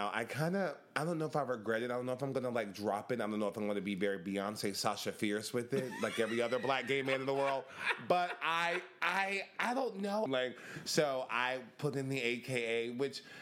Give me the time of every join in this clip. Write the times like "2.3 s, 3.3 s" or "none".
10.3 s